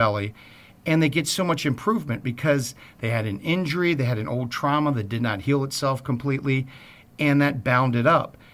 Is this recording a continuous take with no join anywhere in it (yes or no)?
yes